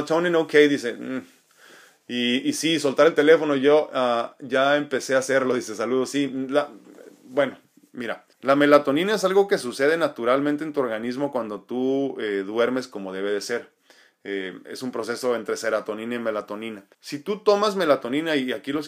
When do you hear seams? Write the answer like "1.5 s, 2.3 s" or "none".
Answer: 8.3 s, 16.9 s